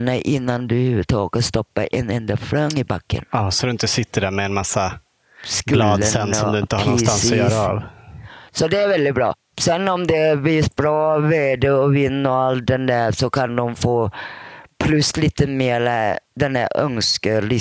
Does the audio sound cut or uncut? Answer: cut